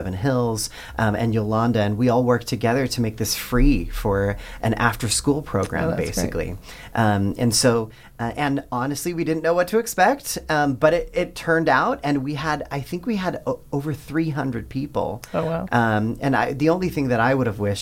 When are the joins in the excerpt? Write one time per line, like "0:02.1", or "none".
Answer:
0:15.7